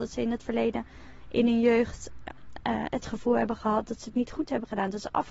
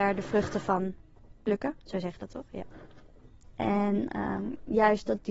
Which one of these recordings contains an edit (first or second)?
second